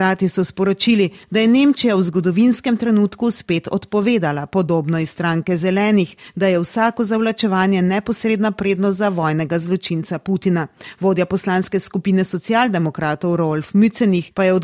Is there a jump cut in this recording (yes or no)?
no